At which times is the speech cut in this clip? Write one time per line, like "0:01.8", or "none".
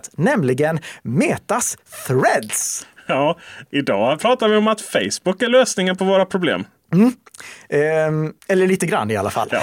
0:08.4